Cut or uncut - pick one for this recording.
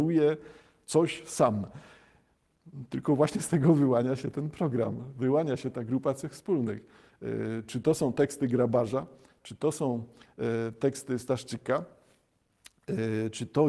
uncut